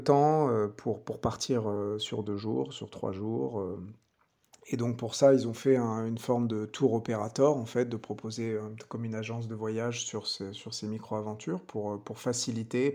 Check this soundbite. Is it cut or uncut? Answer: uncut